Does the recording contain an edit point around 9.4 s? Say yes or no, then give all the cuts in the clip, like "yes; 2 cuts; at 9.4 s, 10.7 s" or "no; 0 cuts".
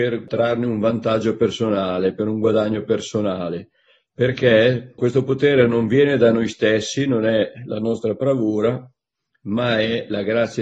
no; 1 cut; at 5.0 s